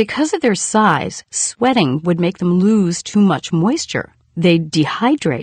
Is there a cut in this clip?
no; 0 cuts

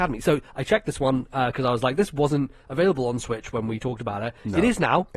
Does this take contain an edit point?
no; 0 cuts

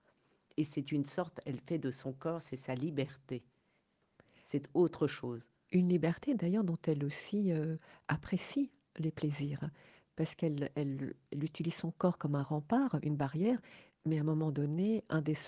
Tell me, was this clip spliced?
no; 0 cuts

